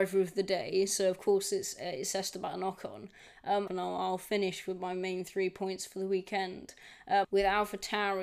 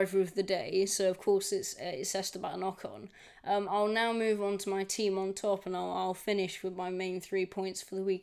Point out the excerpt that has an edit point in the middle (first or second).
first